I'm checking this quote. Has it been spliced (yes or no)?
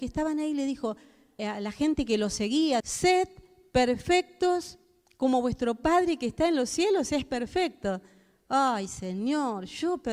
yes